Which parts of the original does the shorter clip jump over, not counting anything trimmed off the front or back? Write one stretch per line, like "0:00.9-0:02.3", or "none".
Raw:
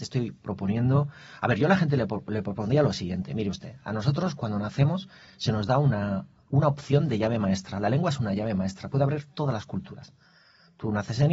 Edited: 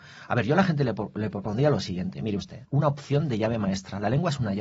0:03.8-0:06.4